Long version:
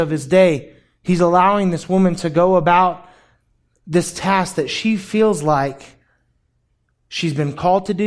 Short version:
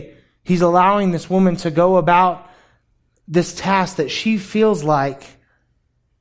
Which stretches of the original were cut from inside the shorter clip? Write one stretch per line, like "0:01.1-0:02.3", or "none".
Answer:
none